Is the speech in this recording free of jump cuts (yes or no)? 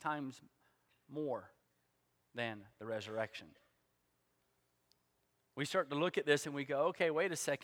yes